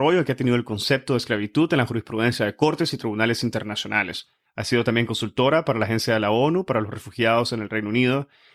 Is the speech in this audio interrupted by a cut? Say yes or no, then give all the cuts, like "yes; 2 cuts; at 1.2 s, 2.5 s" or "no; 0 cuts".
yes; 1 cut; at 4.4 s